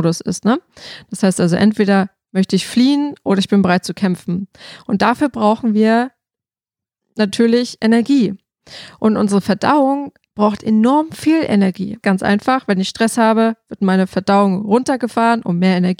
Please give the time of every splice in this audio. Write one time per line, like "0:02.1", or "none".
0:12.0